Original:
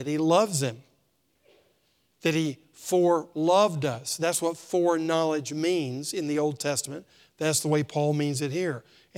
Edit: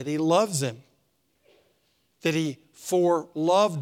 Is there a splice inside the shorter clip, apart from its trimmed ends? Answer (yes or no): no